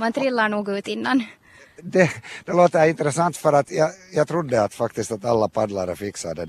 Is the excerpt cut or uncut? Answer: uncut